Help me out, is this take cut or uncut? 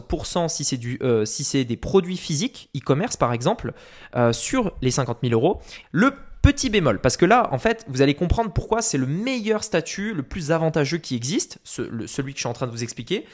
cut